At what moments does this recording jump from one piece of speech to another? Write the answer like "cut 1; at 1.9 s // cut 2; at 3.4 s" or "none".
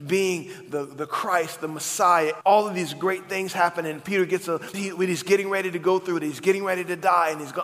cut 1; at 2.4 s // cut 2; at 4.7 s